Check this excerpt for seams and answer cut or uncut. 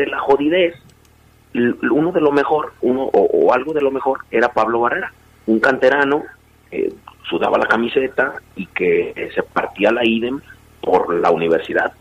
uncut